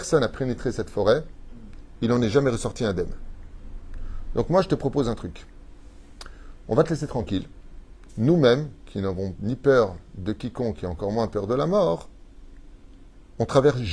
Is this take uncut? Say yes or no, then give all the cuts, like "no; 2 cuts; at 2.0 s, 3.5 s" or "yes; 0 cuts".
no; 1 cut; at 8.1 s